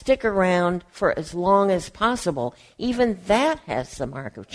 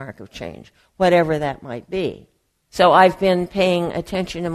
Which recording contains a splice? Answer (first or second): second